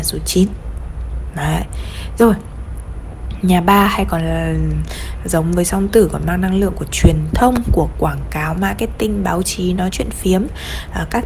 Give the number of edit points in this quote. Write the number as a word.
zero